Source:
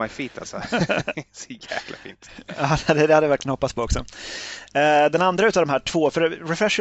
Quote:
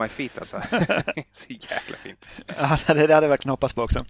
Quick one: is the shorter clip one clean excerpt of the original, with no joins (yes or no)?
yes